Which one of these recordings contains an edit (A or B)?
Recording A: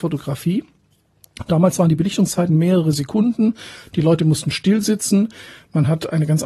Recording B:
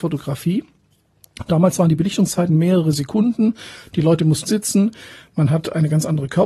B